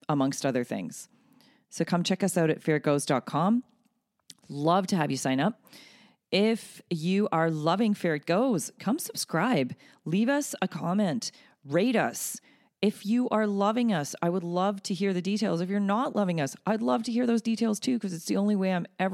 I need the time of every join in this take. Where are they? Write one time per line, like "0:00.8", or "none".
none